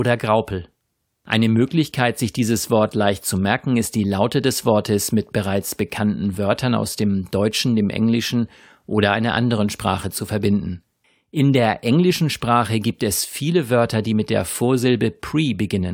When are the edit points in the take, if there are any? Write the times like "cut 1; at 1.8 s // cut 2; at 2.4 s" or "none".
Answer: none